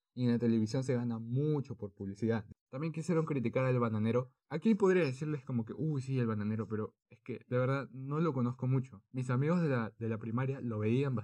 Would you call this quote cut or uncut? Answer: uncut